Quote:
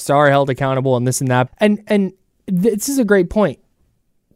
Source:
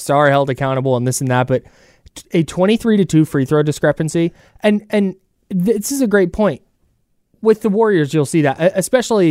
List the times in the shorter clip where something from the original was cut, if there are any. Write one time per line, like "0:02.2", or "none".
0:01.5